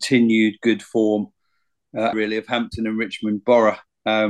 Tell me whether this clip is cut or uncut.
cut